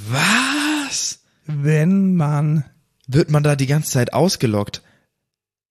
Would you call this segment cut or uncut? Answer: uncut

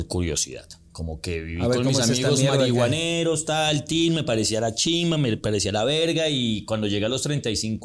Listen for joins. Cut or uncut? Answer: uncut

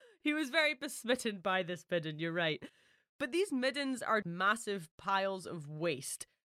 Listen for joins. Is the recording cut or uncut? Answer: cut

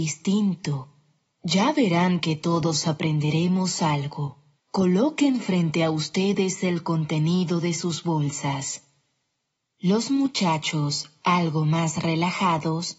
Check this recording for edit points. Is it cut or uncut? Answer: cut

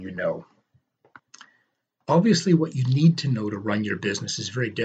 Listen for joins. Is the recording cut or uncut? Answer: uncut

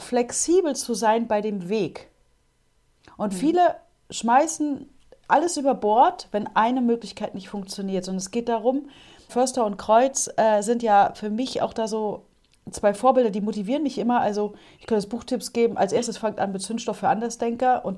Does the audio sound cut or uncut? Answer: cut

